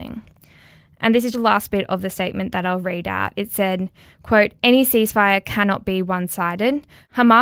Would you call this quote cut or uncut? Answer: cut